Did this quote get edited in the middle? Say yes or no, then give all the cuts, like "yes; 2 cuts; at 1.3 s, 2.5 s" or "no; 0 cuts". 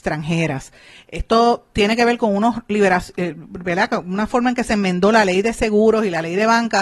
no; 0 cuts